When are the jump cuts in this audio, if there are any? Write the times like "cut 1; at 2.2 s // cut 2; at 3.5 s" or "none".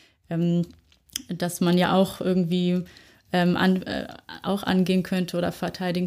none